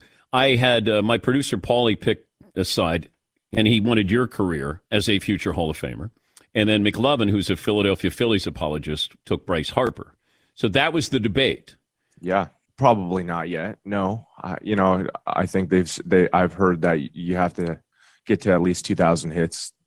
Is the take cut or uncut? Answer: cut